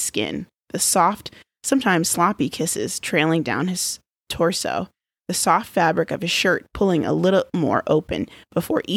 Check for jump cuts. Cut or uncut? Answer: uncut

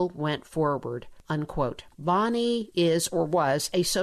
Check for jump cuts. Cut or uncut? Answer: uncut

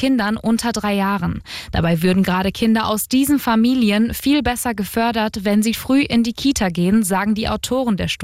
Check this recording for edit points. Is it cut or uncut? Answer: cut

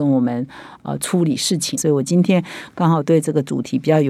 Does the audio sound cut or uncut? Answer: cut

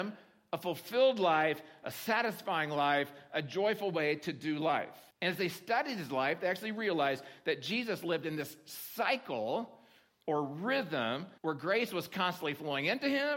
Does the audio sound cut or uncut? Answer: cut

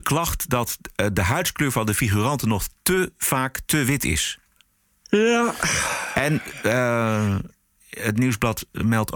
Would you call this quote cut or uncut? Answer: uncut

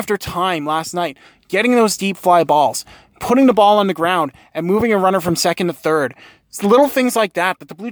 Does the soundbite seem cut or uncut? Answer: uncut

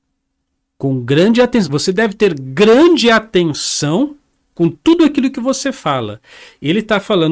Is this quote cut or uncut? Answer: uncut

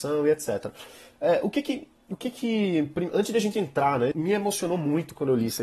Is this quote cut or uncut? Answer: cut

